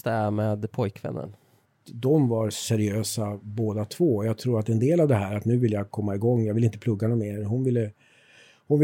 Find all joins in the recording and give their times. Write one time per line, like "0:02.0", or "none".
0:01.6